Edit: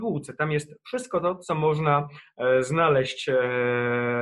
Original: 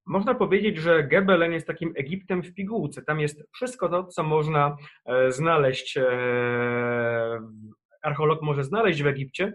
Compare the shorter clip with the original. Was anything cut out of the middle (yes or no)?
no